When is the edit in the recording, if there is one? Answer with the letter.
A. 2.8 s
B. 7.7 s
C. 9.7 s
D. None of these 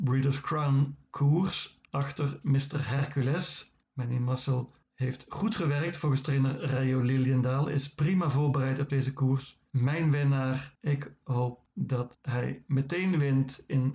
C